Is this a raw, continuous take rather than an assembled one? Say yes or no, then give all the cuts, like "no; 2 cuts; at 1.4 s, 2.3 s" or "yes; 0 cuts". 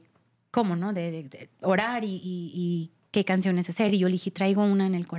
yes; 0 cuts